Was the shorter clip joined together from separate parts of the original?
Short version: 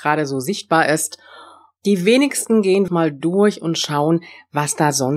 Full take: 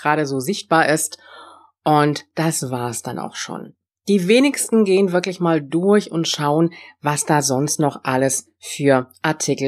yes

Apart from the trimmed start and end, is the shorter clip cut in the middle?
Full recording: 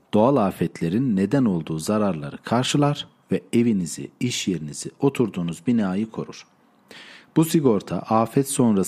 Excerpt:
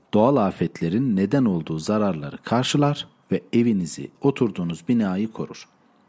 yes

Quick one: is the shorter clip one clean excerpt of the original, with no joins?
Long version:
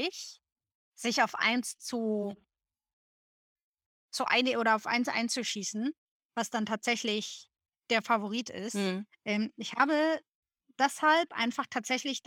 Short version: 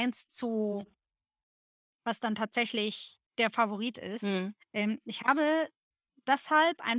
no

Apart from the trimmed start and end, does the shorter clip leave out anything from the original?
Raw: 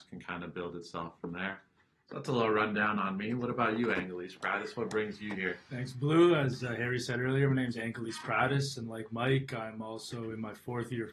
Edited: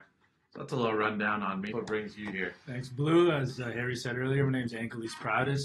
yes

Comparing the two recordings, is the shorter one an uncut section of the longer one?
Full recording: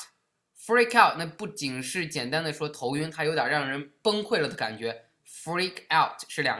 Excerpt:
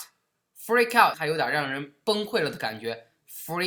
no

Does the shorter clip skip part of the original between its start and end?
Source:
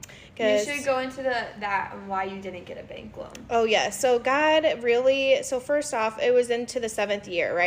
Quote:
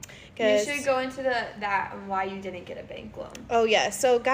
no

